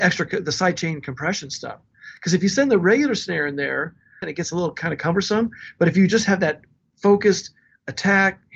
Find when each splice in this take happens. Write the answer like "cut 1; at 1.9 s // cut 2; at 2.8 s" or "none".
cut 1; at 4.2 s

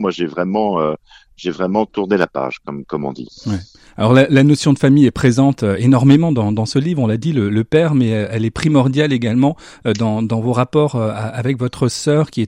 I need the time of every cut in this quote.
none

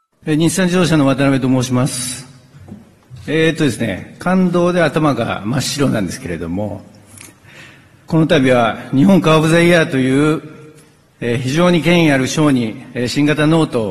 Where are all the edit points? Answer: none

